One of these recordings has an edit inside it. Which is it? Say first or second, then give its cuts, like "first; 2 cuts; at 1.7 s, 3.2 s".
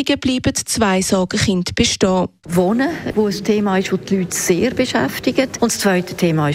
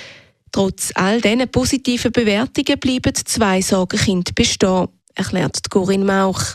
first; 2 cuts; at 2.4 s, 5.6 s